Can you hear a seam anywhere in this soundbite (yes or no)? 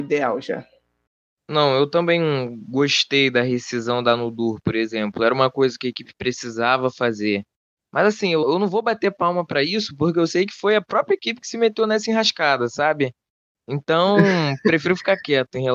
no